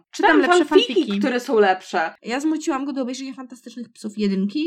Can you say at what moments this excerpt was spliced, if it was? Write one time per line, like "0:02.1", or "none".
0:02.2